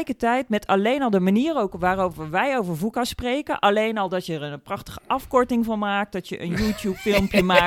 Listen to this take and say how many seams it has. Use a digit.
0